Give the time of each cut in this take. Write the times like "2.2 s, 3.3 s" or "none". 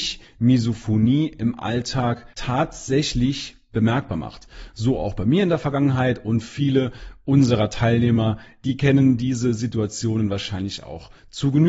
none